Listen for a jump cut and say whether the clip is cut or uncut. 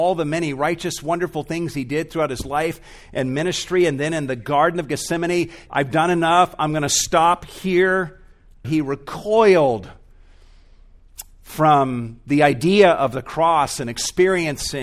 cut